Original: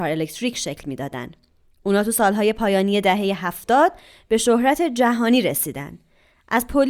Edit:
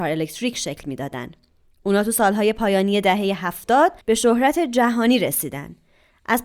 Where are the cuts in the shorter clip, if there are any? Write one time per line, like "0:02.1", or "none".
0:04.0

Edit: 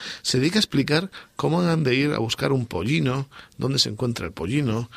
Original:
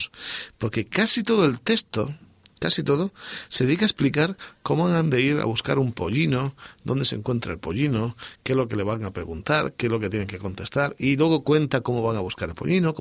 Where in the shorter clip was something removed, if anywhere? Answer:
none

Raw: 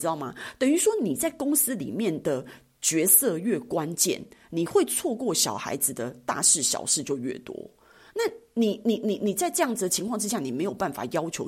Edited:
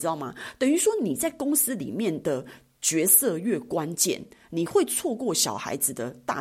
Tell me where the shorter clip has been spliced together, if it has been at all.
none

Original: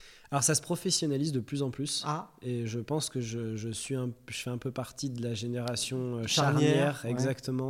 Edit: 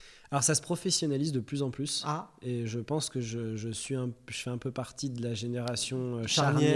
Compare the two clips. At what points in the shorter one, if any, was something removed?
none

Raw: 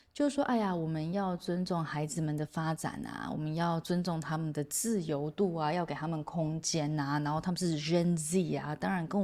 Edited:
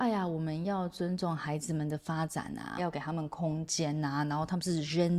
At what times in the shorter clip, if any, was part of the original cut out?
0:02.8

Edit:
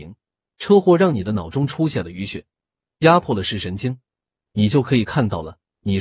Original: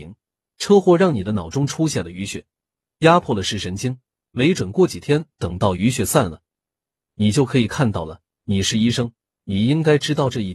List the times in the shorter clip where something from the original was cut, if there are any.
0:04.3

